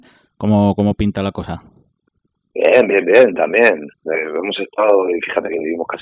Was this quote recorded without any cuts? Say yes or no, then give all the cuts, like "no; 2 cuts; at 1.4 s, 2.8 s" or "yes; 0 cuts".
yes; 0 cuts